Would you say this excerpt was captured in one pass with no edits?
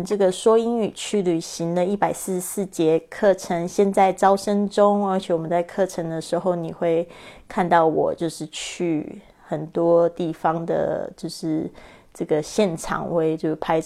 yes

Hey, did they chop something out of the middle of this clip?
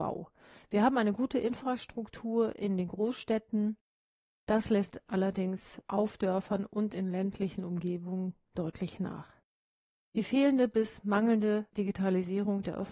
no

